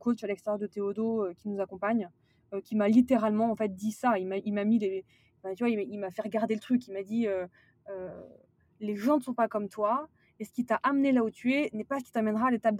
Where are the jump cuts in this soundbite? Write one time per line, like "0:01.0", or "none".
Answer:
none